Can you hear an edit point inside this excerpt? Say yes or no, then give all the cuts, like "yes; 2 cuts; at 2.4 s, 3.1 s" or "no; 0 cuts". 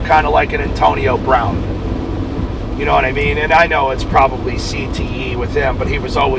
no; 0 cuts